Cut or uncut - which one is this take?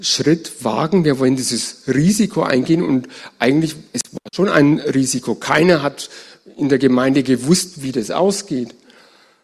uncut